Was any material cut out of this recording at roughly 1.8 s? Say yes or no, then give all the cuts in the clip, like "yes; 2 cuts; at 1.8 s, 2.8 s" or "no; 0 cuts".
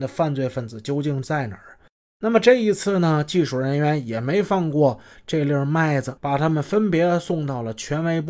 no; 1 cut; at 6.2 s